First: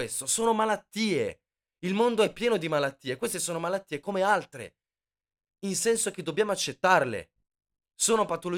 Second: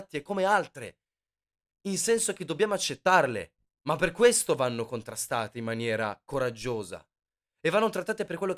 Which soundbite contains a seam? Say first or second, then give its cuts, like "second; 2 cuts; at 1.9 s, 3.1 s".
second; 1 cut; at 3.7 s